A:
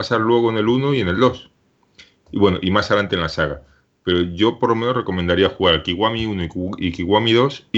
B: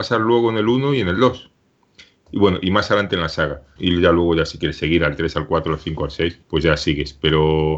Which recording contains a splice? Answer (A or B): B